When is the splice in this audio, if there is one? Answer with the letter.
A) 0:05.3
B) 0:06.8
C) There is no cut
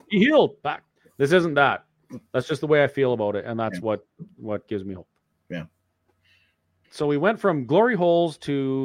B